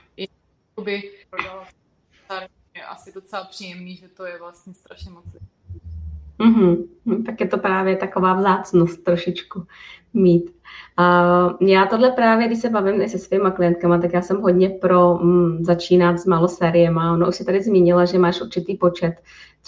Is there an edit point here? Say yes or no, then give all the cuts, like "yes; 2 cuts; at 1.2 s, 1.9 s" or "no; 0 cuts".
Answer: yes; 1 cut; at 1.2 s